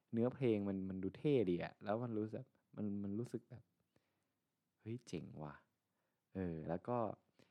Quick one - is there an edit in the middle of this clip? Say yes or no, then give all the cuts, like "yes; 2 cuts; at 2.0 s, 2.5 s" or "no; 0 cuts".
no; 0 cuts